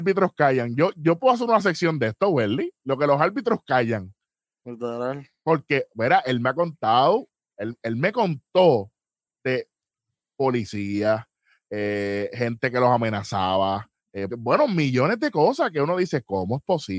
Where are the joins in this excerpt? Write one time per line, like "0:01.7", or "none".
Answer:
0:14.3